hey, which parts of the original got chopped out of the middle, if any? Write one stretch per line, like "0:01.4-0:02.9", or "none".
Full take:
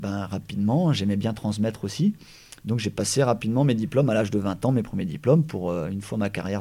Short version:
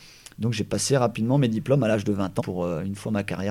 0:04.7-0:05.5